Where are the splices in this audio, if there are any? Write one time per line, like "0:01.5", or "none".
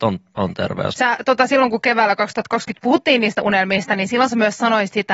0:00.9